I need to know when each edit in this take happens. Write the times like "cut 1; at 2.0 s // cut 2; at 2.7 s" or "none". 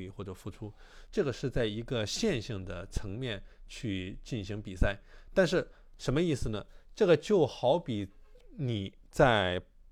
cut 1; at 1.1 s // cut 2; at 6.0 s